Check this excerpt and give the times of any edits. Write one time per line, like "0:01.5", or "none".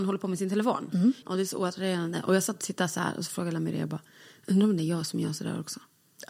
0:01.2